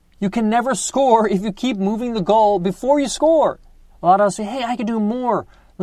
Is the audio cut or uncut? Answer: cut